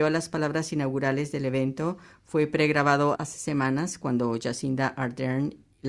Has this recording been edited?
yes; 1 cut; at 3.2 s

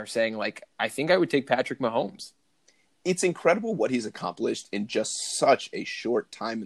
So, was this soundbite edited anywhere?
no; 0 cuts

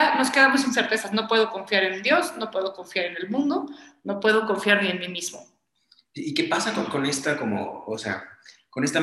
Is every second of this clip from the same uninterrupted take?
yes; 0 cuts

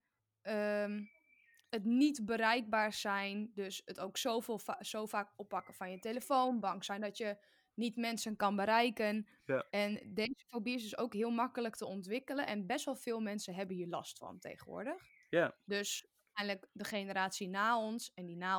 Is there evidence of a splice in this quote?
no; 0 cuts

